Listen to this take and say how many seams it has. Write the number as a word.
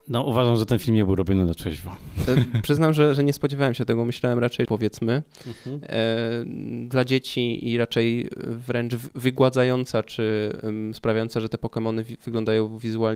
one